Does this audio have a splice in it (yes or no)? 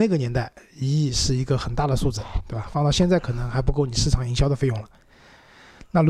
no